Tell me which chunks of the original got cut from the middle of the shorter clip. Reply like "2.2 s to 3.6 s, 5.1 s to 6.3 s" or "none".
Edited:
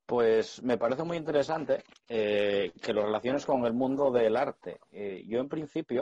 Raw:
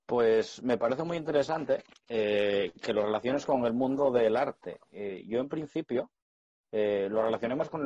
none